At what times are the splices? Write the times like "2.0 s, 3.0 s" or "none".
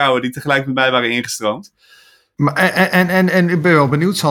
2.4 s

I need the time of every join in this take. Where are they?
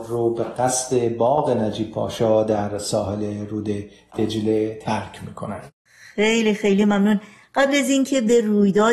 none

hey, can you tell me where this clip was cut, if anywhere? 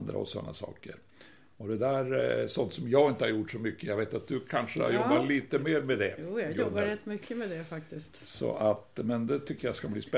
none

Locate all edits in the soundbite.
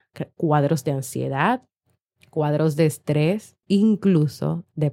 3.6 s

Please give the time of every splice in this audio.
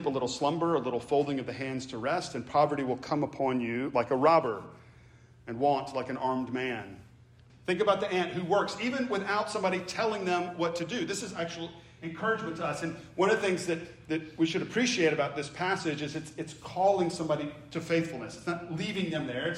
7.5 s

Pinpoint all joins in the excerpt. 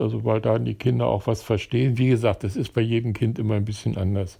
none

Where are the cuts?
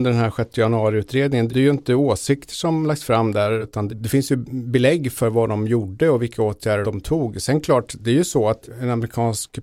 6.8 s

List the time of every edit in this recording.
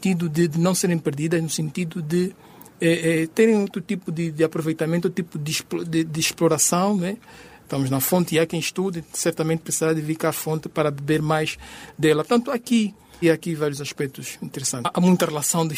7.6 s, 13.2 s

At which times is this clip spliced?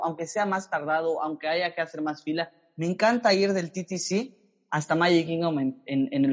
none

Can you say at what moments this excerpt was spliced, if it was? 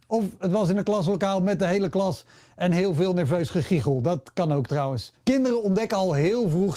5.2 s

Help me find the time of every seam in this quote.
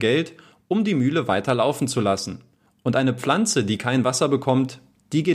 none

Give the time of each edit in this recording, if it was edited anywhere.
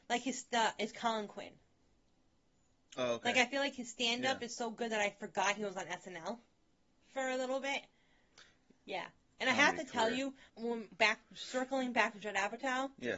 8.9 s, 10.5 s

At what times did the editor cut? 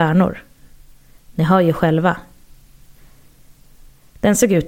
none

